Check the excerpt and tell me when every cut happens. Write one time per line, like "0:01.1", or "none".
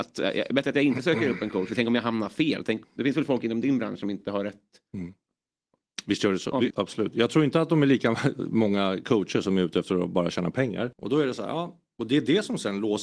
0:02.8
0:06.7
0:10.9